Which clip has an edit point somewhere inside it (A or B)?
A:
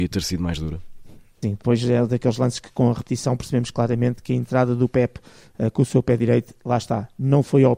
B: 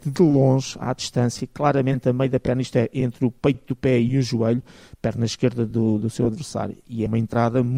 A